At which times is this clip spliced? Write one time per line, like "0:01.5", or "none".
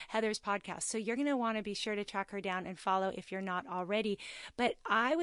none